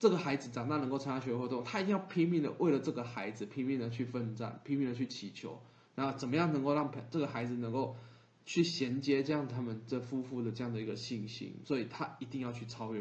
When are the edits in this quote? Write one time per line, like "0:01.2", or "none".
0:11.6